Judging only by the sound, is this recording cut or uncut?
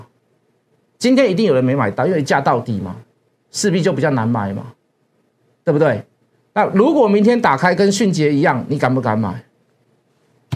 uncut